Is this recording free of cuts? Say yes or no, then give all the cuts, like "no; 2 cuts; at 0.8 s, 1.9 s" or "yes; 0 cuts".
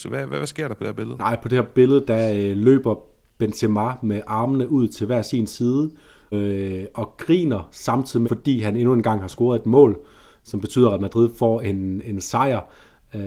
no; 2 cuts; at 6.3 s, 8.2 s